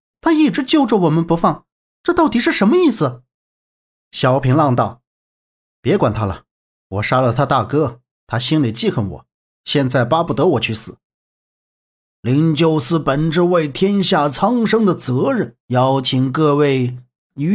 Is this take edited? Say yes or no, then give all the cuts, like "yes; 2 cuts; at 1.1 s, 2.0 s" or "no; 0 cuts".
yes; 2 cuts; at 12.1 s, 15.6 s